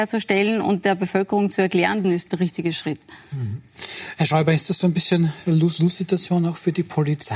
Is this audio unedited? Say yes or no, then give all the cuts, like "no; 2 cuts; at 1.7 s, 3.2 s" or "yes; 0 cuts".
no; 1 cut; at 2.0 s